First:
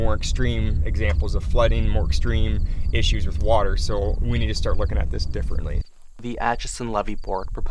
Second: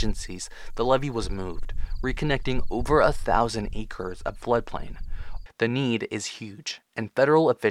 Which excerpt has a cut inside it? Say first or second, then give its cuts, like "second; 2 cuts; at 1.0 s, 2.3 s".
second; 1 cut; at 5.5 s